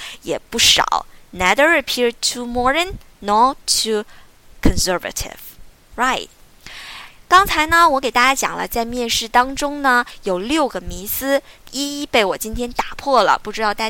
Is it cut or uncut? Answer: uncut